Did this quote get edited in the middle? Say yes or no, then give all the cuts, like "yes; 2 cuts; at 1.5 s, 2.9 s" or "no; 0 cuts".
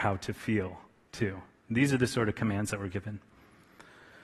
no; 0 cuts